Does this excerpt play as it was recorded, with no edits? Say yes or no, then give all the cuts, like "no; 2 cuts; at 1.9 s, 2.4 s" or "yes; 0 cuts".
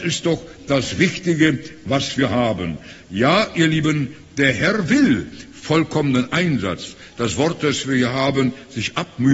yes; 0 cuts